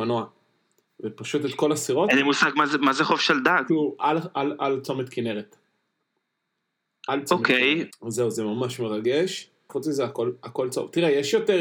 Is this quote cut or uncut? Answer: cut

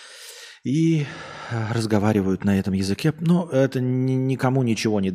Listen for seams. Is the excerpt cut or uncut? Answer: uncut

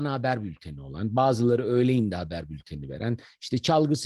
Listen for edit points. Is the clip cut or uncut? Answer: uncut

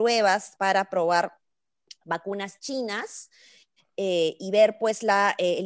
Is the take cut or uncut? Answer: uncut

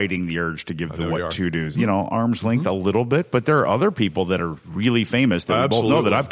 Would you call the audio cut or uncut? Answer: cut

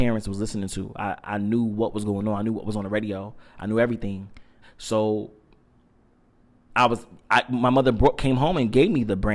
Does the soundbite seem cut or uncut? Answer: cut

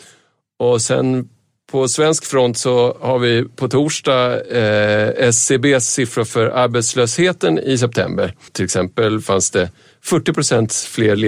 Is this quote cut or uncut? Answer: cut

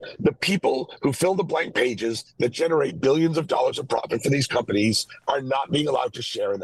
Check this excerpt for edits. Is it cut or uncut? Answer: uncut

